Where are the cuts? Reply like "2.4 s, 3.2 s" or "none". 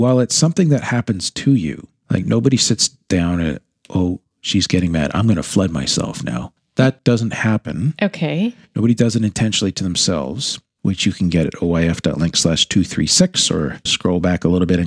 10.8 s, 13.9 s